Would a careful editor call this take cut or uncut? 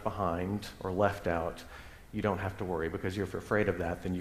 uncut